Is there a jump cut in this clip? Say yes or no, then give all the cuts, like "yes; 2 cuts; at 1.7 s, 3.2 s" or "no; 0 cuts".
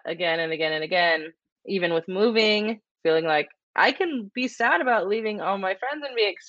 no; 0 cuts